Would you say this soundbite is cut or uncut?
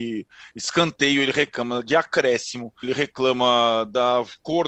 cut